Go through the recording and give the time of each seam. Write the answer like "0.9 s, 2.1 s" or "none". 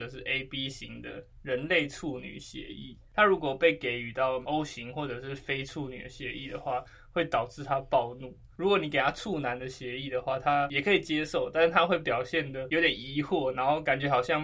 none